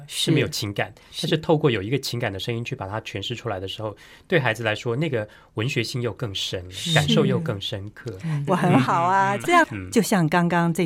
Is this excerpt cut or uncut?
cut